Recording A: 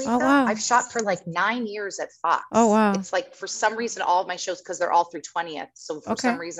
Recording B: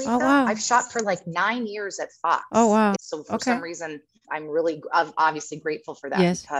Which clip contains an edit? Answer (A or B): B